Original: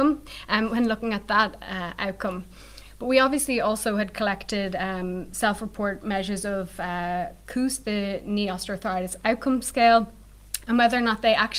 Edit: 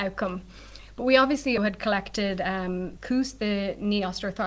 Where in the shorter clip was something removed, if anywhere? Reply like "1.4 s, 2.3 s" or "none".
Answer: 1.6 s, 3.0 s

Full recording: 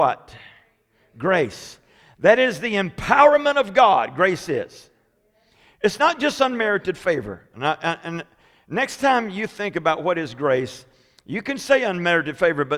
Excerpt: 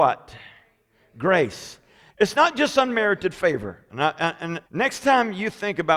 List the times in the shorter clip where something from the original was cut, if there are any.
2.1 s, 4.7 s

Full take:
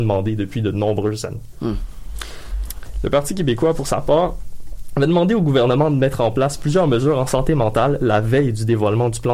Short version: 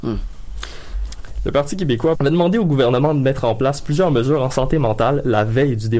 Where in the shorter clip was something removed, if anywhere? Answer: 2.2 s

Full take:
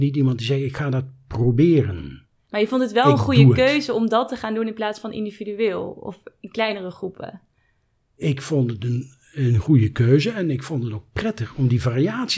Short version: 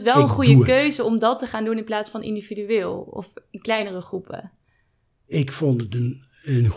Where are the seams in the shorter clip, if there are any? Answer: none

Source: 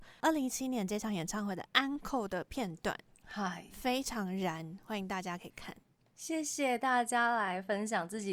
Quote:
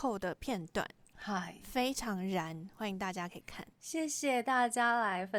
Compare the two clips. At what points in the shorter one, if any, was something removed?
3.7 s

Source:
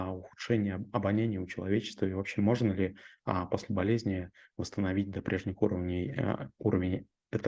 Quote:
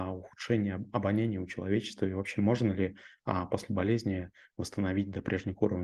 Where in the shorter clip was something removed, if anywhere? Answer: none

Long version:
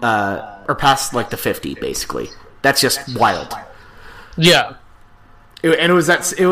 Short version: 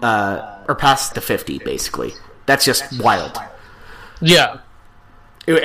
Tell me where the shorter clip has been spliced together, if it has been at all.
1.1 s

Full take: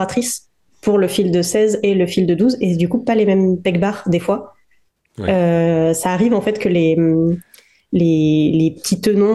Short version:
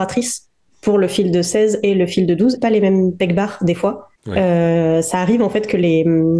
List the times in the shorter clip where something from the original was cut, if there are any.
2.6 s, 4.2 s

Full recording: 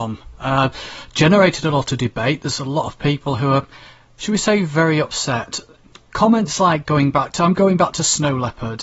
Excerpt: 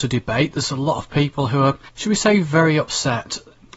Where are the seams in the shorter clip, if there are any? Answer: 1.9 s

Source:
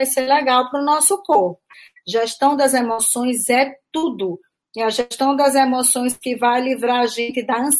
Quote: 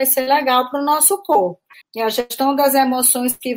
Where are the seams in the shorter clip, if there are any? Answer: 1.8 s

